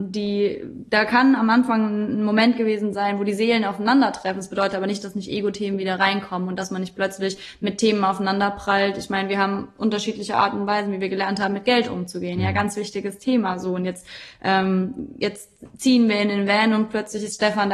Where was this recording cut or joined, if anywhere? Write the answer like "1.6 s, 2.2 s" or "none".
none